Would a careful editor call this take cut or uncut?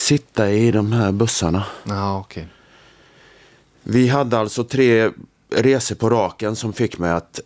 uncut